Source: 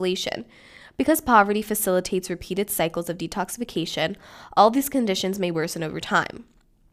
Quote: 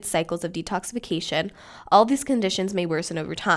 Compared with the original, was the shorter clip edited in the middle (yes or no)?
no